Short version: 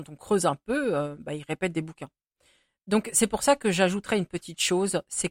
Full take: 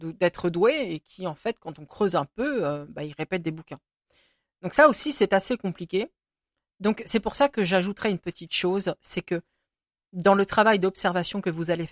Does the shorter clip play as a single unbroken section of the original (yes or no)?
no